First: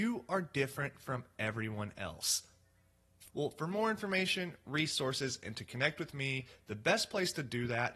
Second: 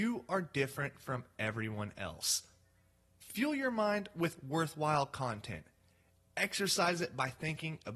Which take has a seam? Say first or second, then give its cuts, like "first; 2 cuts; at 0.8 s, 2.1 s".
first; 1 cut; at 3.2 s